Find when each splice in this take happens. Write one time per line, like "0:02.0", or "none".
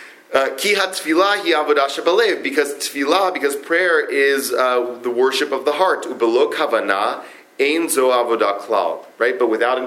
none